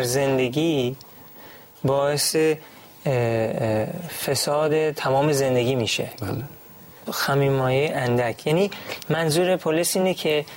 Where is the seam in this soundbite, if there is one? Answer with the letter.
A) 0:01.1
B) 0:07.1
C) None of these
B